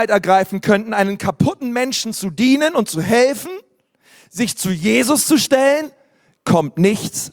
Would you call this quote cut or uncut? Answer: uncut